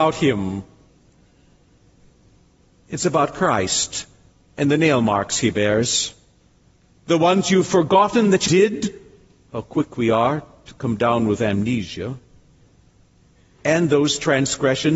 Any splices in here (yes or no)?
yes